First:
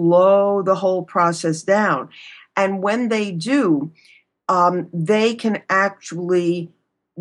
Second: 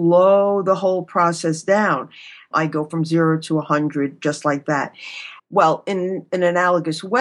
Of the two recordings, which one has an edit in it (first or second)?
second